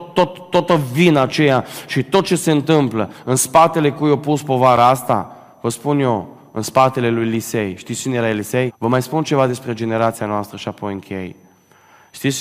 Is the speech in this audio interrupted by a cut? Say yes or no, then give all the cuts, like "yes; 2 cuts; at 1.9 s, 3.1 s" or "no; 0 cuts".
yes; 1 cut; at 8.7 s